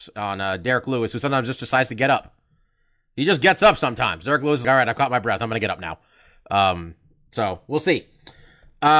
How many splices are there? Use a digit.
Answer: 1